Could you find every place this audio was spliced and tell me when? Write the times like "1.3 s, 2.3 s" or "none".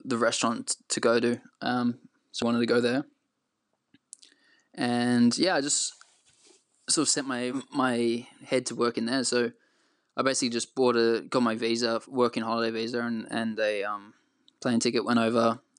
2.4 s